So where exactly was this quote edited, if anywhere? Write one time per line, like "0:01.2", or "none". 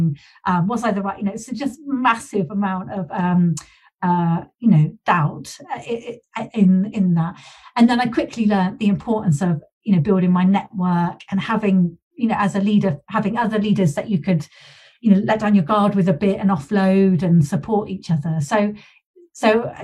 none